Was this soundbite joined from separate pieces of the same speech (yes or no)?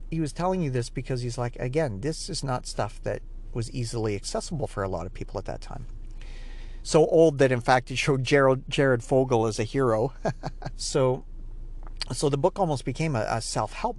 yes